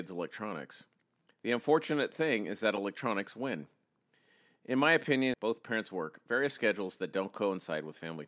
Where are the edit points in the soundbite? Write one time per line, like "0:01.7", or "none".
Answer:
0:05.3